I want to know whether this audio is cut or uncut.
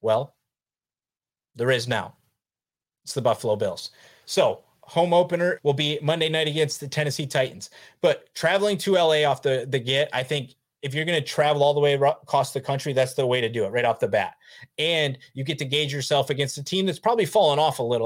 cut